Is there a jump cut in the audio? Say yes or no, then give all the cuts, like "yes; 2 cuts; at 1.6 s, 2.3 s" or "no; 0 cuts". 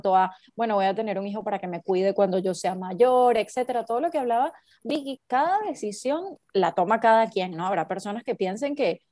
yes; 1 cut; at 5.2 s